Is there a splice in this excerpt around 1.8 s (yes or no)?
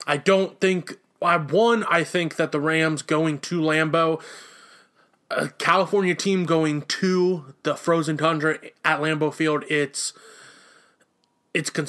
no